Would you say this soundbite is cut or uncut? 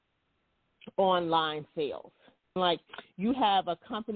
cut